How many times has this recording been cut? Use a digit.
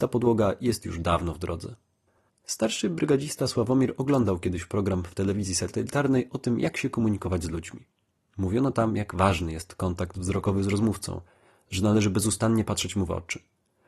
1